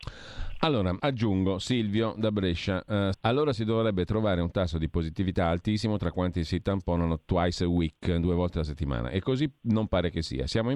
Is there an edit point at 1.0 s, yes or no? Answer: yes